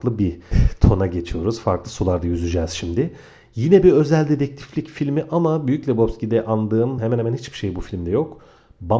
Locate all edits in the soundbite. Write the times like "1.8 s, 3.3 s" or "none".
none